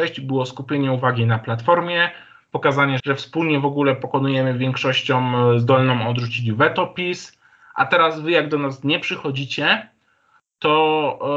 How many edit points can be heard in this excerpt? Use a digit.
1